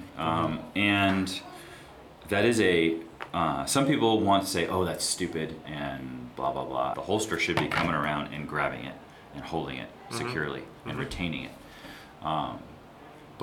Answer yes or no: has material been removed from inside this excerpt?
yes